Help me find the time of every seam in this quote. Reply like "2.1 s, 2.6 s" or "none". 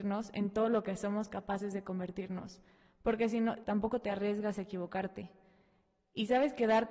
3.6 s

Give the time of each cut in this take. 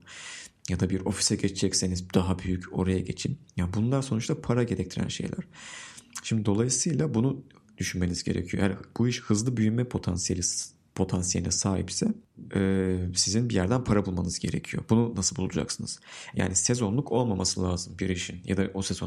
16.3 s

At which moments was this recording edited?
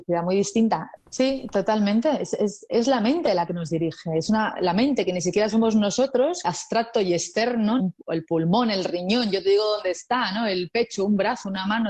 1.0 s, 6.4 s, 7.8 s

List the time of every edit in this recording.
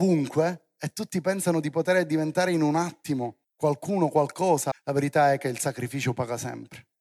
3.4 s, 4.7 s

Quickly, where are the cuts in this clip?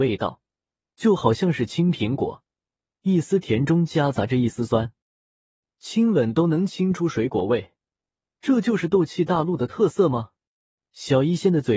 10.8 s

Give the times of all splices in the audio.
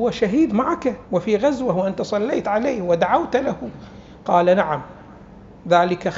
1.0 s

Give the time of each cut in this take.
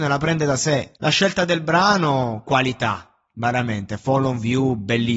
0.9 s

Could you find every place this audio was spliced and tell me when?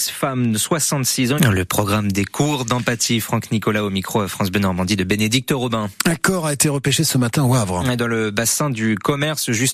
1.4 s

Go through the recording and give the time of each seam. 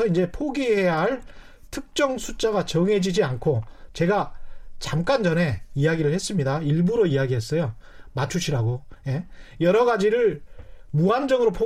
none

